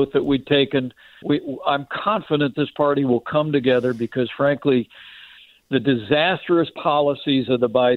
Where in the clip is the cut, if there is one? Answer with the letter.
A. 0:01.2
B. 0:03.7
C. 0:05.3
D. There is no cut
A